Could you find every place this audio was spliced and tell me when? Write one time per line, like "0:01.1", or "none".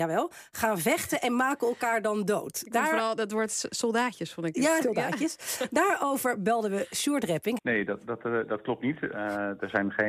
0:04.8
0:07.6